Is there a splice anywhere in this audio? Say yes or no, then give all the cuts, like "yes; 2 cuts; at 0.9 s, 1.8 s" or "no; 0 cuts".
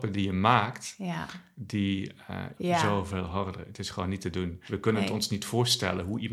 yes; 2 cuts; at 2.6 s, 4.7 s